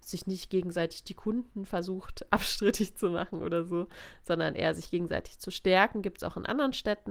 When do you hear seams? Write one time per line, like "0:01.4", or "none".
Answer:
none